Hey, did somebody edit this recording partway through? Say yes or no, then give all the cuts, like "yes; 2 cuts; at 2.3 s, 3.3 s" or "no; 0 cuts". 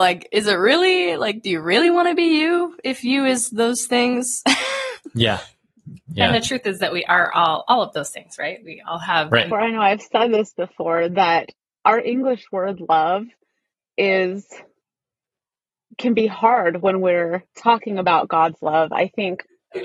yes; 2 cuts; at 9.5 s, 17.5 s